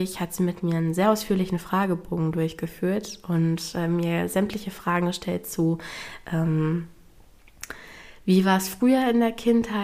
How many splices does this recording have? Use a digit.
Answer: 0